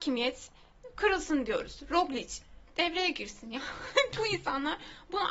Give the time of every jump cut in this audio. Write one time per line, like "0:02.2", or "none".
0:04.1